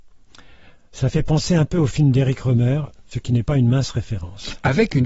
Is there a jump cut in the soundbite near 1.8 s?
no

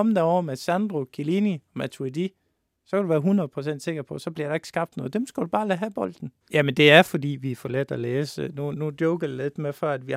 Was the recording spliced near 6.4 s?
yes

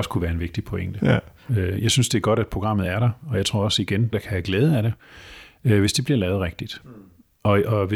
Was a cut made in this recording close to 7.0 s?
no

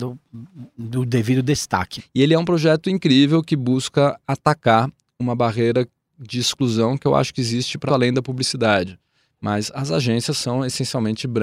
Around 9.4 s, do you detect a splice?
no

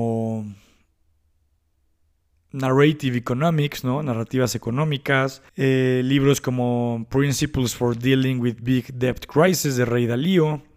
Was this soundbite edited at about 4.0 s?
no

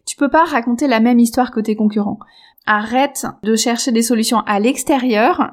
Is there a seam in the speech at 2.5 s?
yes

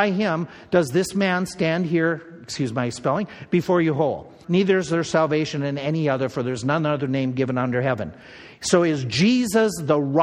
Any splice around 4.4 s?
yes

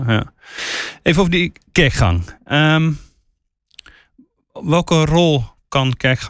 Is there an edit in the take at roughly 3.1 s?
no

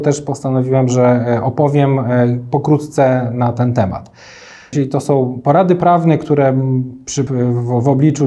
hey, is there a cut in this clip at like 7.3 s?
yes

